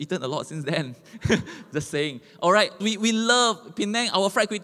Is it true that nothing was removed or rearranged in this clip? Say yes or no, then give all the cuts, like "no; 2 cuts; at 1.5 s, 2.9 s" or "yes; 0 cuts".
no; 1 cut; at 2.8 s